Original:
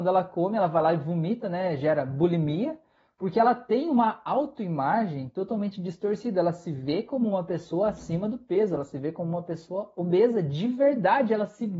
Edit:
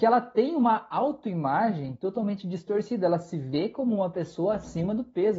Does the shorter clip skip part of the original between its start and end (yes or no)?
no